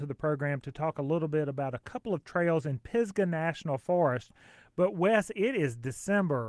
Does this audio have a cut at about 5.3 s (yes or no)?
no